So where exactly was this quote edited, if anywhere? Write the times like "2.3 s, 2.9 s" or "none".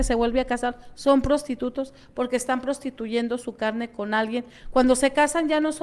none